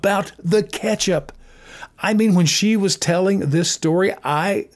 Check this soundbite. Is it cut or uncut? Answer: uncut